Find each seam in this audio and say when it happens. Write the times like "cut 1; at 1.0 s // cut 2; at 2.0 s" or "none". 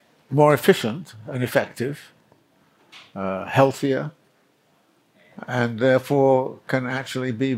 none